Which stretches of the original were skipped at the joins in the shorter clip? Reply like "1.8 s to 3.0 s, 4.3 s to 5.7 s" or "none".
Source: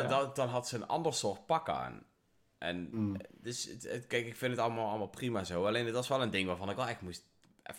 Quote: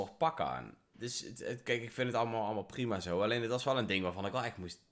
2.2 s to 3.4 s